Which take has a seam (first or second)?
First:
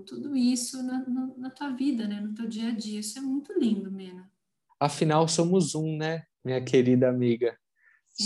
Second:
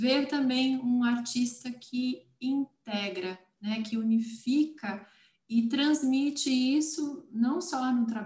first